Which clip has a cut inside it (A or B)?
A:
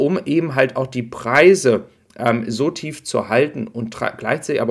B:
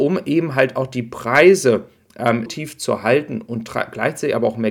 B